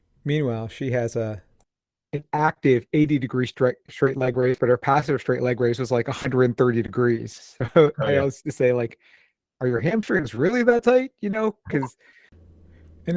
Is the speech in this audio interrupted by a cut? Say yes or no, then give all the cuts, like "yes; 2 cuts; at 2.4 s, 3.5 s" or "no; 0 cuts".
no; 0 cuts